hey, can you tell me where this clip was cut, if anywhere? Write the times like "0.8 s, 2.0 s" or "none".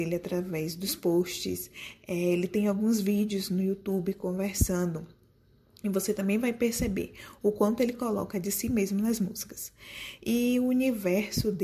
none